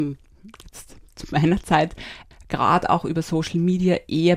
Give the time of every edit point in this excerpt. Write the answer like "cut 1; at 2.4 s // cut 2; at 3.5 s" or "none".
cut 1; at 2.3 s